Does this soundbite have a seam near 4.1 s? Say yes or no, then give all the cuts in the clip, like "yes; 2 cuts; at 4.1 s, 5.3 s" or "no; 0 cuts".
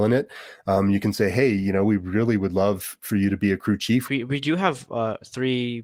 yes; 1 cut; at 4.1 s